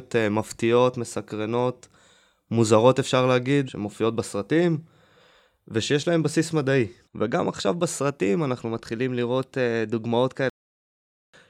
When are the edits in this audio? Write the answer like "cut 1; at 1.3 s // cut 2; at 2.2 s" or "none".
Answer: cut 1; at 7.1 s